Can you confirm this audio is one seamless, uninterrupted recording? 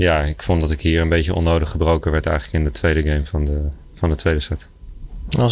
yes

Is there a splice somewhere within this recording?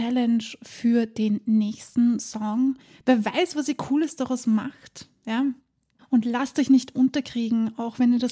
no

